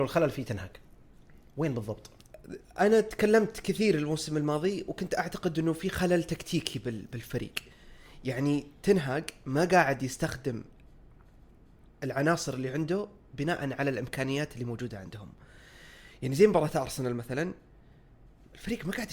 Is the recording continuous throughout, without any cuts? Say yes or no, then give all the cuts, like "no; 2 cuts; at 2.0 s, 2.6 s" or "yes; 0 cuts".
yes; 0 cuts